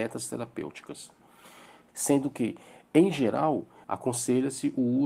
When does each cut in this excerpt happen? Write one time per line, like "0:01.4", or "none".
0:01.9
0:03.8